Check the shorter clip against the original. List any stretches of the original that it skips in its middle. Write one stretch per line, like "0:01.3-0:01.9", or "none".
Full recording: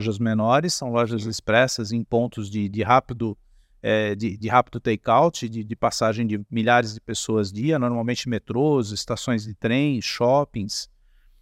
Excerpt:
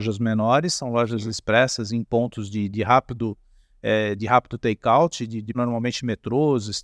0:04.2-0:04.4
0:05.8-0:07.8